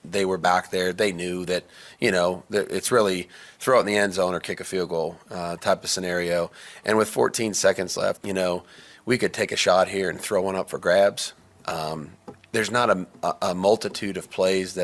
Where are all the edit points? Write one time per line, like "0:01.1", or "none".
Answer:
0:08.2